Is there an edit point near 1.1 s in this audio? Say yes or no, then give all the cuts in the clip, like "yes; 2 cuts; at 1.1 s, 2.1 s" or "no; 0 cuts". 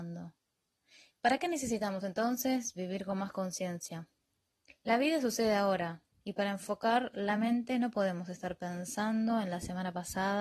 yes; 2 cuts; at 1.1 s, 4.7 s